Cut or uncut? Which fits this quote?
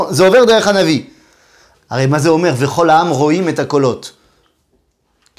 cut